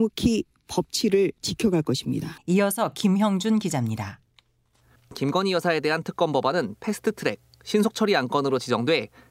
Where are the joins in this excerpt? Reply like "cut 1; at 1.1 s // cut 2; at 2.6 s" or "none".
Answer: cut 1; at 2.4 s